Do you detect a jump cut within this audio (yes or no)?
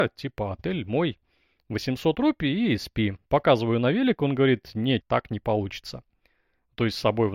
yes